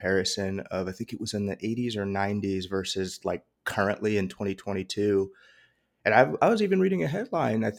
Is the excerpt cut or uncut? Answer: uncut